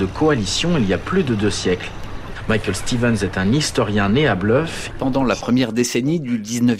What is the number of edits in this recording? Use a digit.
1